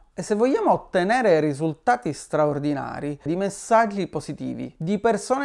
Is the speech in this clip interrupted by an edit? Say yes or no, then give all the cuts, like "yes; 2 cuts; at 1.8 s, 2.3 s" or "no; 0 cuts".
yes; 1 cut; at 3.3 s